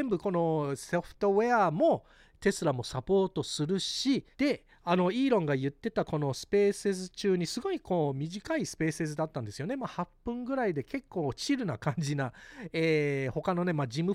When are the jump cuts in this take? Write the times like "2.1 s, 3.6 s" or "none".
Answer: 4.3 s